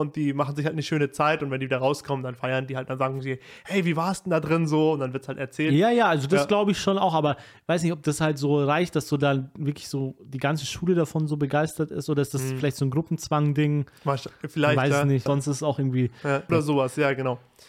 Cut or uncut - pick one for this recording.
cut